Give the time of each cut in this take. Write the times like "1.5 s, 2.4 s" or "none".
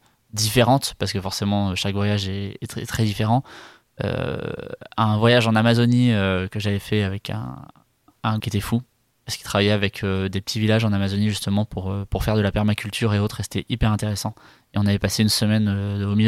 8.4 s